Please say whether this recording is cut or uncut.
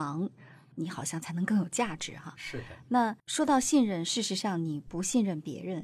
uncut